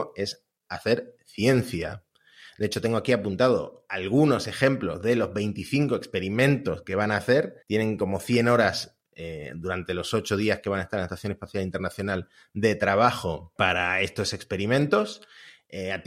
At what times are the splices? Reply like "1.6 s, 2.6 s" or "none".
7.6 s